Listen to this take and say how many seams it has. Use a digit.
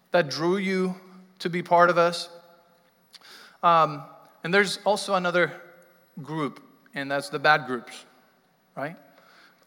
0